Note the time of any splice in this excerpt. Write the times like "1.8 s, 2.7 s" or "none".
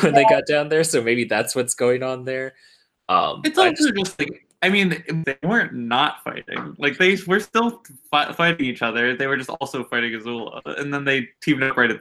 5.2 s